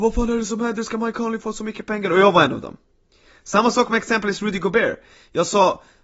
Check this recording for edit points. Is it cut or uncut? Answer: uncut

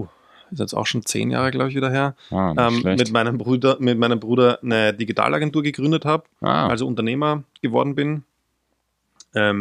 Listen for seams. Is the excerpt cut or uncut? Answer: uncut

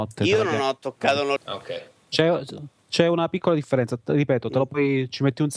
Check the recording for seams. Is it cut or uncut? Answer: cut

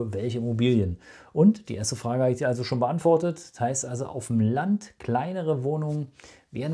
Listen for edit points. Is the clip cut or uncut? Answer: uncut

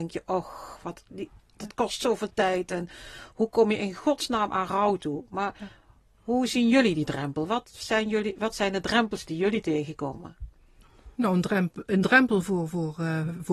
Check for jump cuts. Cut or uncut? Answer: cut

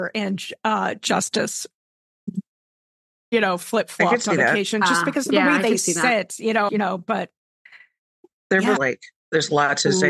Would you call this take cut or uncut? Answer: cut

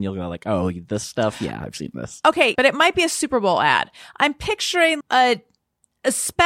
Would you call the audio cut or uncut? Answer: cut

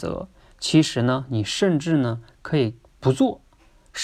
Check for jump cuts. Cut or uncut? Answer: uncut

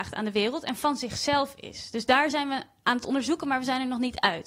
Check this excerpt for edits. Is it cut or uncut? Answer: uncut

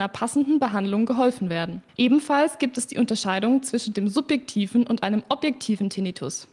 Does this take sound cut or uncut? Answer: cut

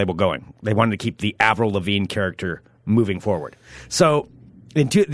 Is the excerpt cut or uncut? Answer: uncut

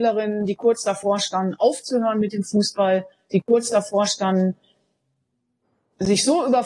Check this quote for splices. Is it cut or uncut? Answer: uncut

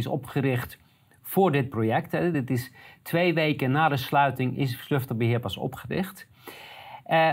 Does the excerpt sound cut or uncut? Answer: uncut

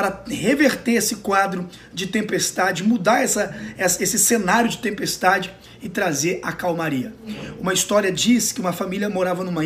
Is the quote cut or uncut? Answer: uncut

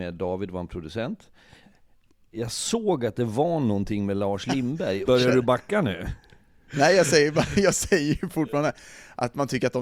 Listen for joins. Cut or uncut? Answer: cut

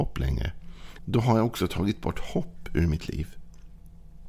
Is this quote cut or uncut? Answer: cut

